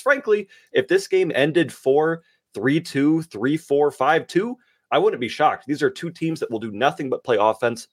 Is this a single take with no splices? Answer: no; 1 cut; at 1.7 s

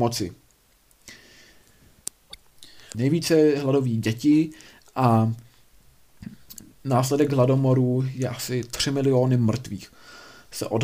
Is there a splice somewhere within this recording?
yes; 1 cut; at 2.9 s

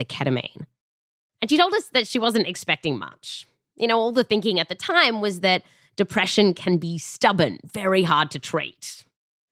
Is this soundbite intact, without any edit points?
yes; 0 cuts

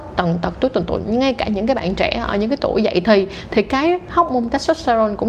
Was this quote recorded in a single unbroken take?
yes; 0 cuts

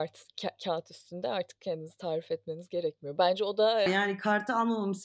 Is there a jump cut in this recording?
yes; 1 cut; at 3.9 s

